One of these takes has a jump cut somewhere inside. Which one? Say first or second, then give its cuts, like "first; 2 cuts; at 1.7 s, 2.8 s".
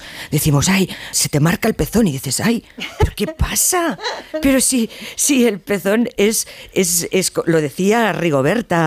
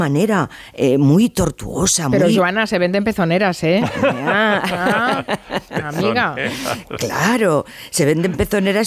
first; 1 cut; at 1.1 s